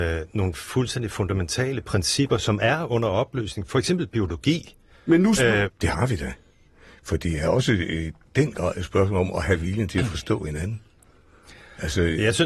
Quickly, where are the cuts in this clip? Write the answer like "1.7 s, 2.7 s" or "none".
5.7 s

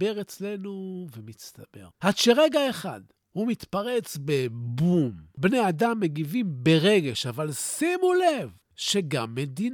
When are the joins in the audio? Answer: none

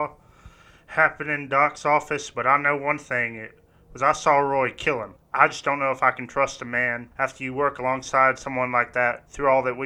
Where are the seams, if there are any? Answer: 5.2 s

